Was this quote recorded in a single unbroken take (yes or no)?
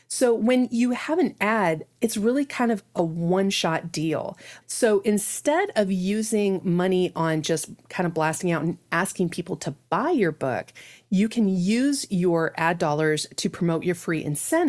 no